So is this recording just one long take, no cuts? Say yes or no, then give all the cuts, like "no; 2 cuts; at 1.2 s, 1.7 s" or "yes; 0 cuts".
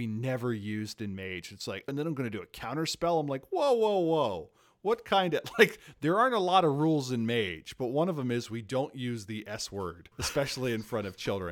no; 1 cut; at 1.9 s